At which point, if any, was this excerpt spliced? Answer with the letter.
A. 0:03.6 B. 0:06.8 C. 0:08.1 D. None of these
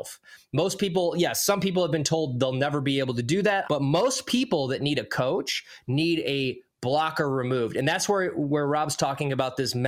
A